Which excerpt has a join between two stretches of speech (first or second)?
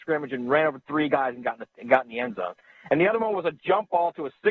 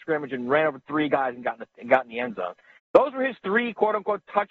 second